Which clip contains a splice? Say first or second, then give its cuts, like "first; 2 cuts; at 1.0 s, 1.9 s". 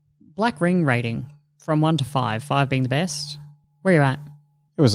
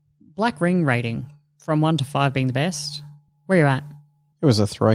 second; 1 cut; at 2.1 s